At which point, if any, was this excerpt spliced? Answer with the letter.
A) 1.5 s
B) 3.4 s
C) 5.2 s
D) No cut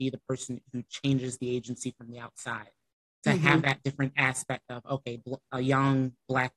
C